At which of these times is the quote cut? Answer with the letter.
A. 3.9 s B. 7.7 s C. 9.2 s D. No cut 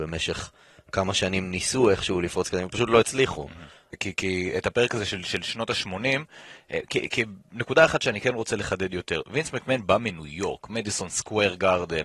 A